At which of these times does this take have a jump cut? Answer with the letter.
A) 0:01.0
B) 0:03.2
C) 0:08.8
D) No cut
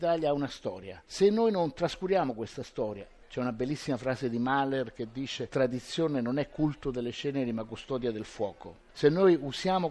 B